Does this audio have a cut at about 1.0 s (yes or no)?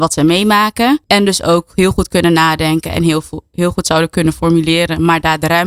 yes